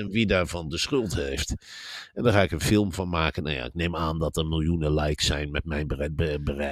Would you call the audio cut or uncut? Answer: uncut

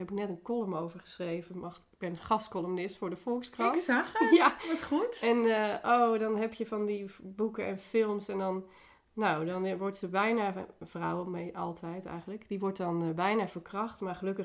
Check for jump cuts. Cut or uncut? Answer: uncut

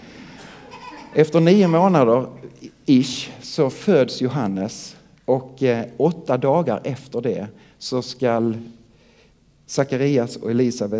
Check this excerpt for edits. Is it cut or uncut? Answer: uncut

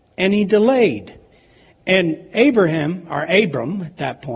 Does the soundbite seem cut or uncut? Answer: uncut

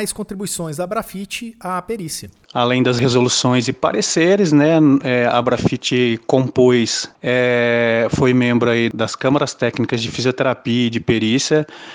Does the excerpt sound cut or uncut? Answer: uncut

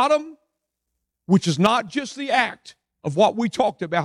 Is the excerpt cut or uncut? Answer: uncut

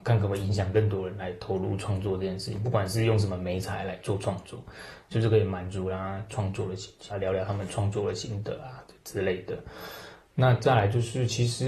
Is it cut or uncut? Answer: cut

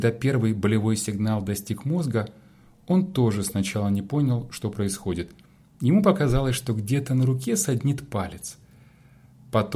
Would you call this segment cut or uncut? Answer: uncut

